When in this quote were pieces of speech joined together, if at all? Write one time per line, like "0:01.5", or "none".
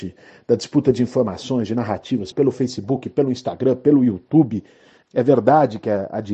0:02.3
0:05.0